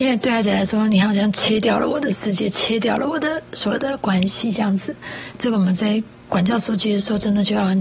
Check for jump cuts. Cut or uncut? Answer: cut